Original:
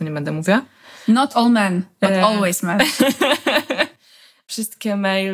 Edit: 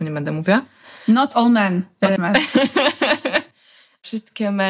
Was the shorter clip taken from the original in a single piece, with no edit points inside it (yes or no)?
no